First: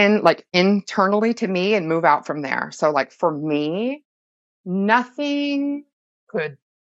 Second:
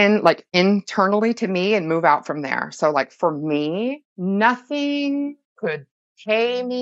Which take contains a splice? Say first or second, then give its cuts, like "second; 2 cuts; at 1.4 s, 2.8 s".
second; 2 cuts; at 4.1 s, 5.5 s